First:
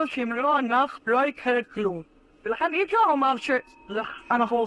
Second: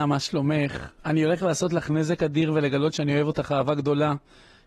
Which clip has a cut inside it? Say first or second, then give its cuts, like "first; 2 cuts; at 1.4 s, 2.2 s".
first; 1 cut; at 1.0 s